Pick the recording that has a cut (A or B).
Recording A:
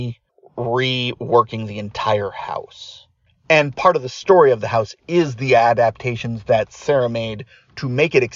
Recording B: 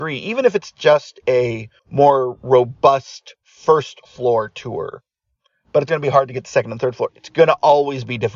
B